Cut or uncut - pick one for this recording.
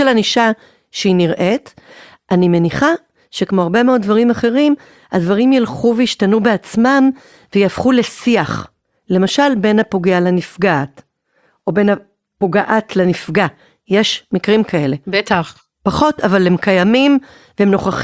uncut